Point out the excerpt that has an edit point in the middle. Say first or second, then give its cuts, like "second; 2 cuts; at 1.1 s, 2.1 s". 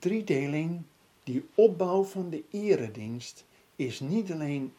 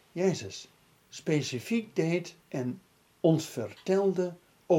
second; 1 cut; at 2.4 s